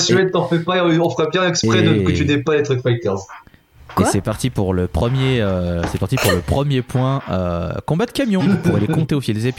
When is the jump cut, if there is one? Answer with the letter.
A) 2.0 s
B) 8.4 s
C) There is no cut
B